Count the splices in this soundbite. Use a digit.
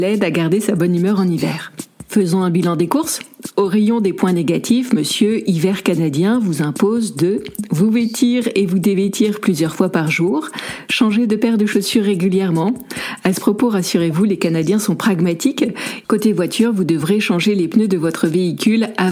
1